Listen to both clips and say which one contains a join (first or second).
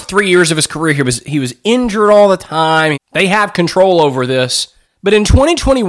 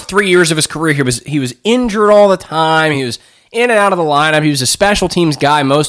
first